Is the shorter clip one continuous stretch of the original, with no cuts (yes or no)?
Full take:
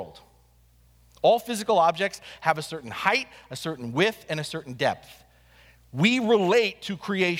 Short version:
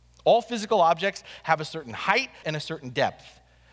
no